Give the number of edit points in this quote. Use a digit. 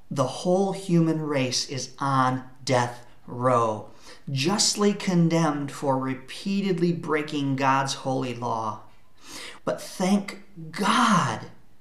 1